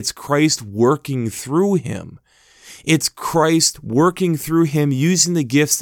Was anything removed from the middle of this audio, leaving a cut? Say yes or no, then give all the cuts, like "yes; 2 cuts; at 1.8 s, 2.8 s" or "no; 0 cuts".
no; 0 cuts